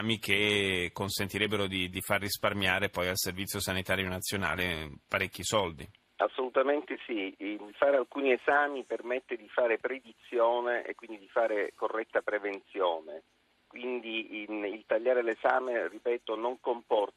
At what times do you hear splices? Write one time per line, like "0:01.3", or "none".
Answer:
none